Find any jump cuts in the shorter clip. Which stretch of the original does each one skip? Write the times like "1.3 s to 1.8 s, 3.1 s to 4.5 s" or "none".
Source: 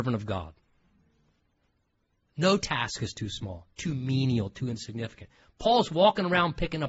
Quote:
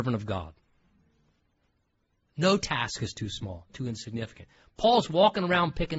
3.7 s to 4.5 s